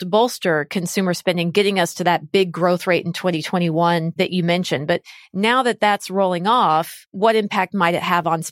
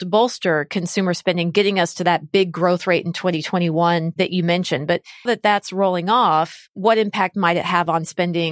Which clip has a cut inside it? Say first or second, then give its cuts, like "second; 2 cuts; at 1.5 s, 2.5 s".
second; 1 cut; at 5.3 s